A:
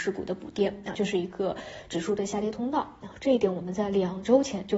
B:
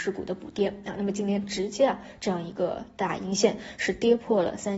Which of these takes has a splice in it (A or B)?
A